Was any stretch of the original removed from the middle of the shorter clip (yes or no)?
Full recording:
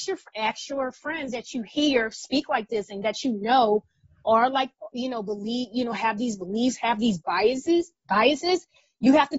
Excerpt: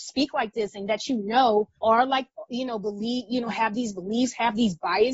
yes